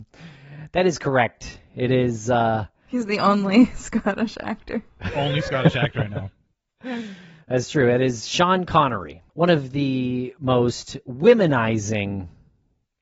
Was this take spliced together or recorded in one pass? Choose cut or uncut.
uncut